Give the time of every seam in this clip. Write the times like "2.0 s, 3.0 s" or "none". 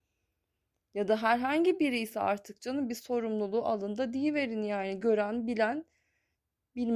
none